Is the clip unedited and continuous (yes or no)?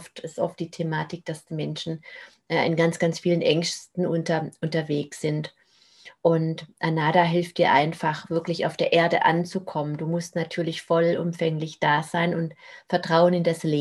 yes